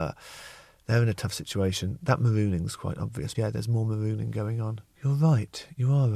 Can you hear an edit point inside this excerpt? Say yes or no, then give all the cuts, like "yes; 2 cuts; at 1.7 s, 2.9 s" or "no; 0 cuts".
yes; 2 cuts; at 3.3 s, 4.9 s